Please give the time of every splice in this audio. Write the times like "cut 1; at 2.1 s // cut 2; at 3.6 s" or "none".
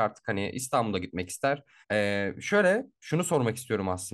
cut 1; at 1.8 s

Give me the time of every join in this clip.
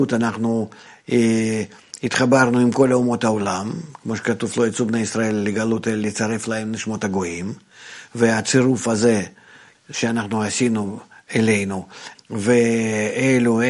cut 1; at 9.7 s // cut 2; at 12.1 s

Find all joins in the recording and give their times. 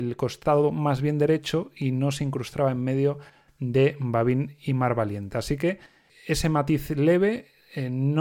none

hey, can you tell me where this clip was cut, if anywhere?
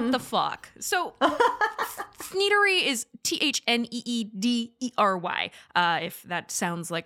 none

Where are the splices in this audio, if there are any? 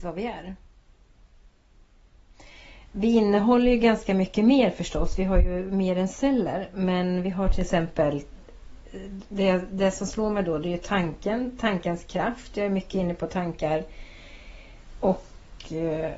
none

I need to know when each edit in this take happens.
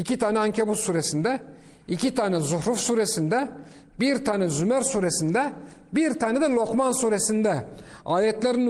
none

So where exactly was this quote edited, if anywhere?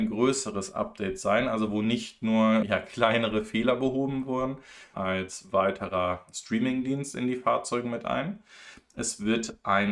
cut 1; at 2.6 s // cut 2; at 4.9 s

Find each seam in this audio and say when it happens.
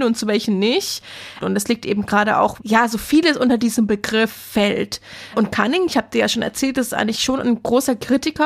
cut 1; at 1.4 s // cut 2; at 2.6 s

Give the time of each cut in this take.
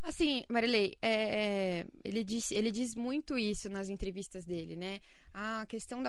none

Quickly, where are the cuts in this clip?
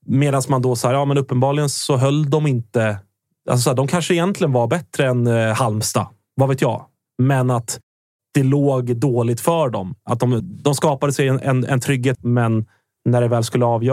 cut 1; at 10.4 s // cut 2; at 12.1 s

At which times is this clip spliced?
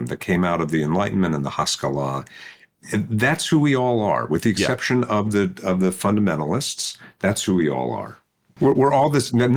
cut 1; at 8.6 s

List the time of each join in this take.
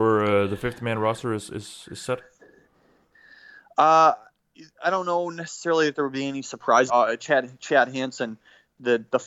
cut 1; at 6.9 s

